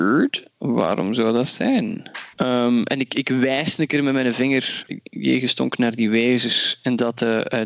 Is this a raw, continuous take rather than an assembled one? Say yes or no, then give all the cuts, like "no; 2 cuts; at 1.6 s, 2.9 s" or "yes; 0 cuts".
no; 2 cuts; at 2.3 s, 4.9 s